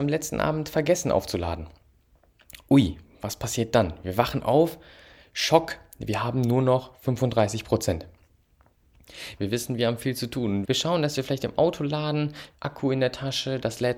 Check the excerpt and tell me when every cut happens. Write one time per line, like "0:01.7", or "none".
0:09.4
0:10.6
0:12.5